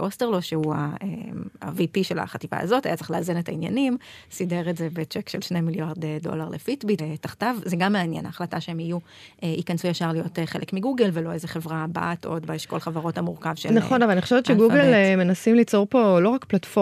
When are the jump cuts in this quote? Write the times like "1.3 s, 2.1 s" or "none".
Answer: 7.0 s